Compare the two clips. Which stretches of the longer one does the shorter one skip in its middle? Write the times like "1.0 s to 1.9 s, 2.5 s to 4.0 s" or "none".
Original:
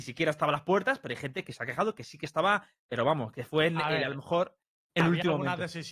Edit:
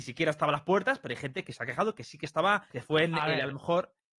2.7 s to 3.3 s